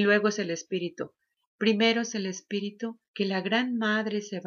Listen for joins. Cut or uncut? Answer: cut